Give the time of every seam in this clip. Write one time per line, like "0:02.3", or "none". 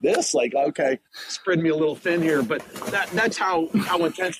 0:01.0